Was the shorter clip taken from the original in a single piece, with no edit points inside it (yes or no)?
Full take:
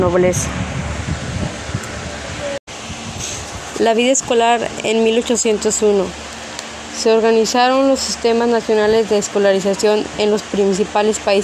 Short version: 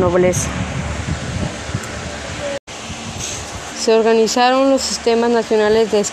no